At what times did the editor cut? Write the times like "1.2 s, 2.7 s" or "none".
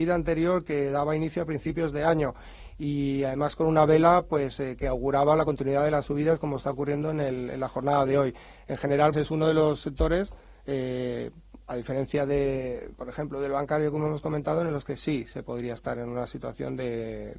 9.1 s